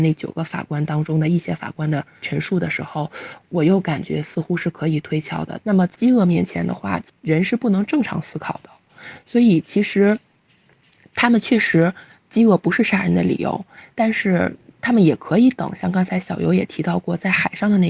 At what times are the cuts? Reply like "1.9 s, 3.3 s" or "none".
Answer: 5.6 s